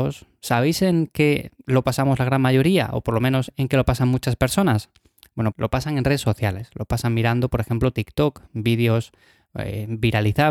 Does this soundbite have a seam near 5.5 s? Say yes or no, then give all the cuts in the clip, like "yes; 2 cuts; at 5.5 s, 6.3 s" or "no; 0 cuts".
yes; 1 cut; at 5.5 s